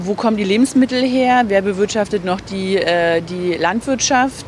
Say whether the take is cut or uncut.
uncut